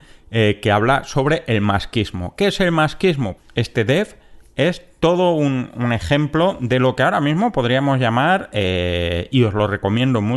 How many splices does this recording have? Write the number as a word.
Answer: one